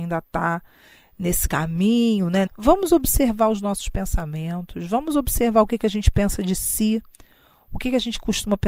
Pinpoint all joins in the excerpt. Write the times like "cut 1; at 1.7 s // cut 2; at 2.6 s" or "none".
cut 1; at 2.5 s